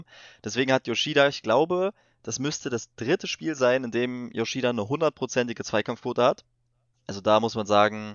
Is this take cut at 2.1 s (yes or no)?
no